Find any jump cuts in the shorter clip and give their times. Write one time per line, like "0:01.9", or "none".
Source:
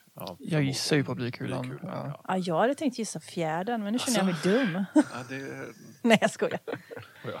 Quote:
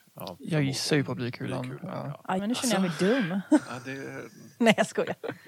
0:02.4